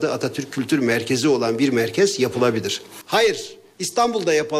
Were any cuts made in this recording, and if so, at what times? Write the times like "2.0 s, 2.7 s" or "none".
3.0 s

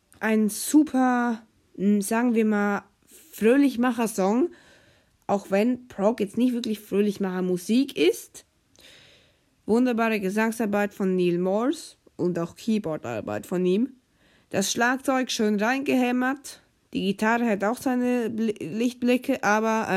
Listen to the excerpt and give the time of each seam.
none

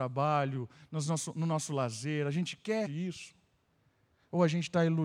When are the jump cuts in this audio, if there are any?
2.9 s

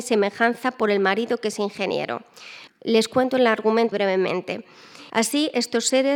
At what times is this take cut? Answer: 2.7 s, 3.9 s, 5.1 s

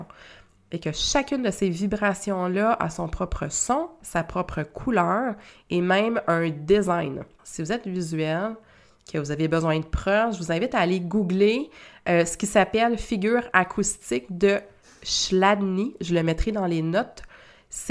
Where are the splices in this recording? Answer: 7.4 s

